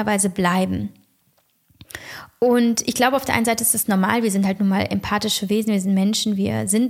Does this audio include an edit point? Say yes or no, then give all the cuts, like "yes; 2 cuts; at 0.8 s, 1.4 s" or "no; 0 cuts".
no; 0 cuts